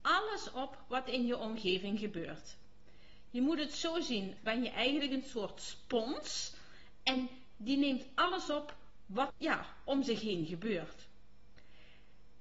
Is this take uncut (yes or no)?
no